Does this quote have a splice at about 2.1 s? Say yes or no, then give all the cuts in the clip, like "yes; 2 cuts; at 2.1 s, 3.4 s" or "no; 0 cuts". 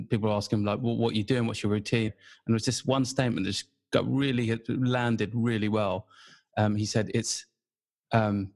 yes; 1 cut; at 2.1 s